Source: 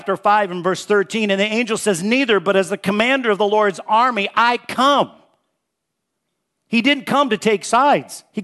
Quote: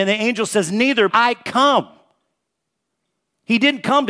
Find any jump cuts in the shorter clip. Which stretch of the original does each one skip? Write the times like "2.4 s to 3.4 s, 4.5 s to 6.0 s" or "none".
2.4 s to 4.3 s